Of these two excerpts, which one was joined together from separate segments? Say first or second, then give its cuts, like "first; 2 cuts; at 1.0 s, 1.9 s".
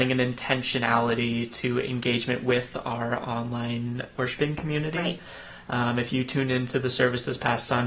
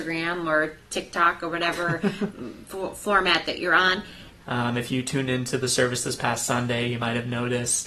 second; 2 cuts; at 2.3 s, 4.4 s